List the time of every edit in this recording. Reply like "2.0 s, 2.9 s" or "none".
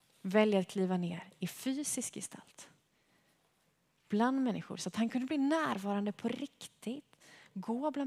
none